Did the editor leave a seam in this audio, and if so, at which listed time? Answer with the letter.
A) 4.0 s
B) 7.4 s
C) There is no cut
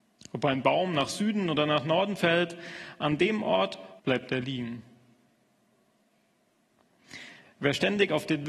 A